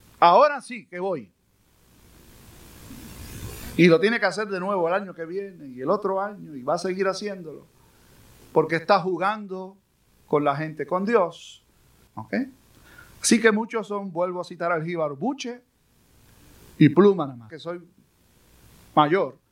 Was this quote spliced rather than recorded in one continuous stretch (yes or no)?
yes